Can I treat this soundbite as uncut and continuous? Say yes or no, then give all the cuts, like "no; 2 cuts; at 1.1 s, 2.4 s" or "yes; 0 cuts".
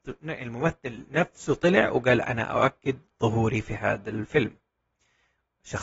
yes; 0 cuts